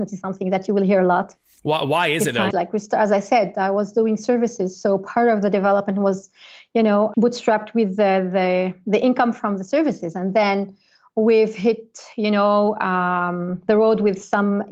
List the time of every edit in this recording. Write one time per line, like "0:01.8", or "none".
0:02.5
0:07.1

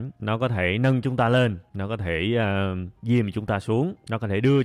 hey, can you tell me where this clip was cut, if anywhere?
none

